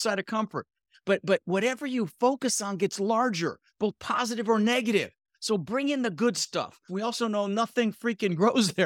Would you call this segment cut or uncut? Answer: cut